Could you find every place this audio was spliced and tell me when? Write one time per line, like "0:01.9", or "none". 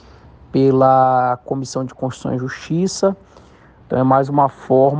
0:03.8